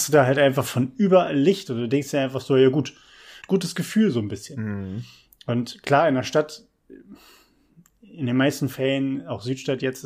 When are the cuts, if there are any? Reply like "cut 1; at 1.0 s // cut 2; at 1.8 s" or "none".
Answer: cut 1; at 3.4 s